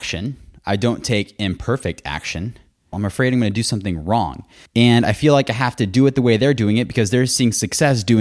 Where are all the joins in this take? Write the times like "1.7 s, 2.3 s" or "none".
2.9 s, 4.7 s